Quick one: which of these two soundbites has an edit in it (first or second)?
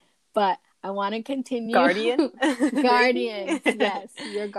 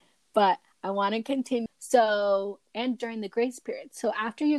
second